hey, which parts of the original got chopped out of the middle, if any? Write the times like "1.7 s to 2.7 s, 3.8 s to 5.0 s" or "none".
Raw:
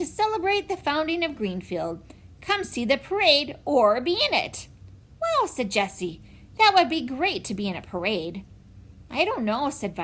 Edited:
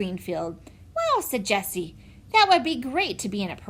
2.4 s to 5.2 s